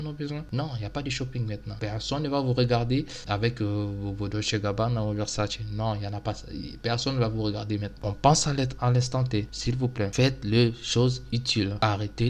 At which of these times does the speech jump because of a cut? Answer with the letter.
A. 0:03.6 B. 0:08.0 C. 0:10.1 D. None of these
B